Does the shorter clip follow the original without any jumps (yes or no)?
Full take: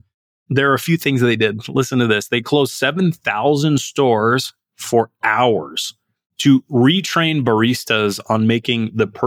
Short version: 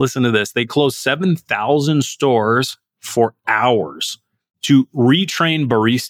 yes